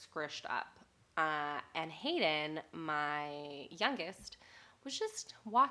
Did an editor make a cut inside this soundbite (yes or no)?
no